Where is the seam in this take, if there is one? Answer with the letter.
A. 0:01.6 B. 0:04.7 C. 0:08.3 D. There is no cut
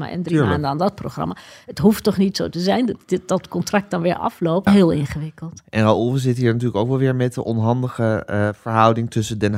B